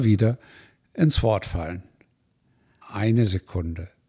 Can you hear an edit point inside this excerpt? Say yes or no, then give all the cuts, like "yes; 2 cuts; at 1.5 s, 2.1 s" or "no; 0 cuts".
yes; 1 cut; at 2.8 s